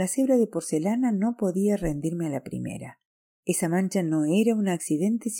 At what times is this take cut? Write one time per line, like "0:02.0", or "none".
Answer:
0:03.3